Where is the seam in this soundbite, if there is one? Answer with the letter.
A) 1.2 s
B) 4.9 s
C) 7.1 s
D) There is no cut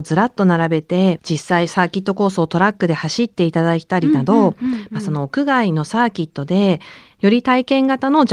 A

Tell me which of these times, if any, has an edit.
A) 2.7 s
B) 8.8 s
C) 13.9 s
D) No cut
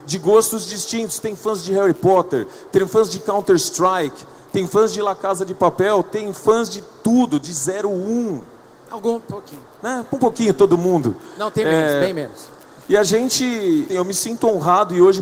C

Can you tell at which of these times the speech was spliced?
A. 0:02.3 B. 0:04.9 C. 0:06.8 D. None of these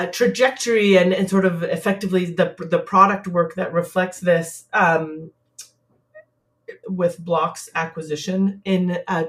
C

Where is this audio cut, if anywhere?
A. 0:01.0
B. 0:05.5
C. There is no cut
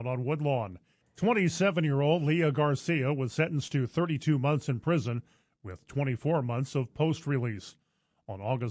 A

